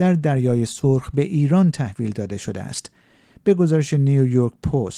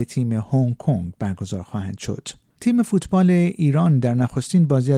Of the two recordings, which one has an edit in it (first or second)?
second